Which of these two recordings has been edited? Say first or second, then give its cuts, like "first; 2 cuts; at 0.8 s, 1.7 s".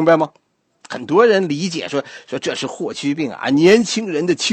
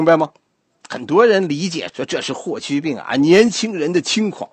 second; 1 cut; at 1.9 s